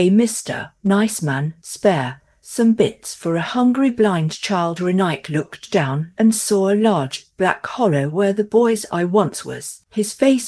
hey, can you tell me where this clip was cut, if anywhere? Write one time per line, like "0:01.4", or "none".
none

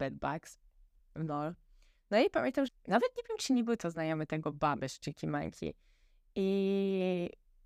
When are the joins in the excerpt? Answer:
0:01.0
0:02.7

